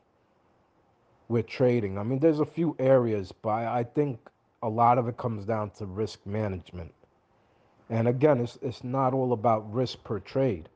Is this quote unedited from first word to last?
yes; 0 cuts

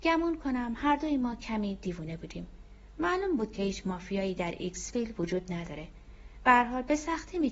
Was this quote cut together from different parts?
no; 0 cuts

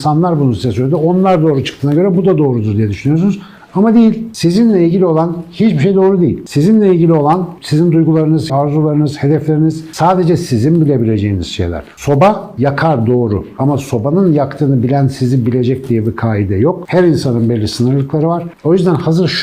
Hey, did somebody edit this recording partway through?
yes; 1 cut; at 8.5 s

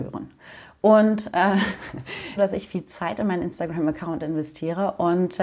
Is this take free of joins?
no; 1 cut; at 2.4 s

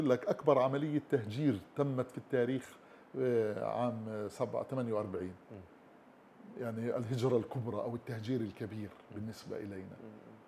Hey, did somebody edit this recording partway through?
no; 0 cuts

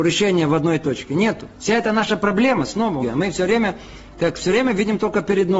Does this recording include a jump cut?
yes; 1 cut; at 3.0 s

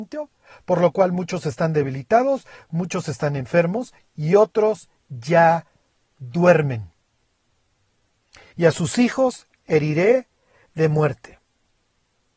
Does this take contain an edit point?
yes; 1 cut; at 8.5 s

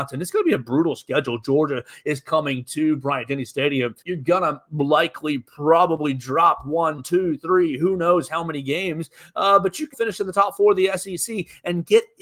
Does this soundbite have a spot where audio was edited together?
yes; 2 cuts; at 4.0 s, 9.9 s

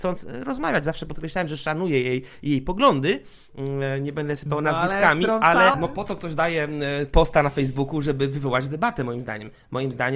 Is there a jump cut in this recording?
yes; 1 cut; at 5.7 s

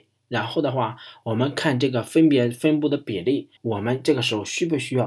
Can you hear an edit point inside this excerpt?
yes; 1 cut; at 3.6 s

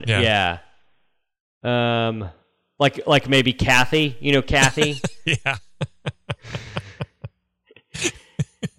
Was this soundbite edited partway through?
no; 0 cuts

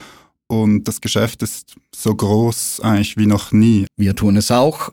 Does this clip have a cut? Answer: yes; 1 cut; at 3.9 s

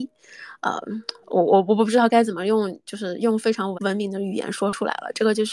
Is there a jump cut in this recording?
yes; 2 cuts; at 1.2 s, 3.7 s

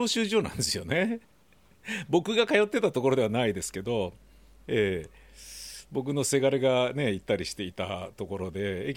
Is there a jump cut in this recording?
yes; 1 cut; at 1.2 s

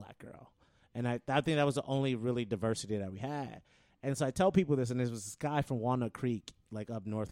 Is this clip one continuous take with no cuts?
yes; 0 cuts

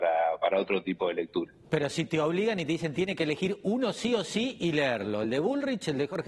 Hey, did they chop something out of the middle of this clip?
no; 0 cuts

